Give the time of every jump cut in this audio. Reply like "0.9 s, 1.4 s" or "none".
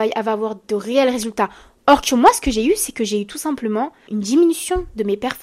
4.1 s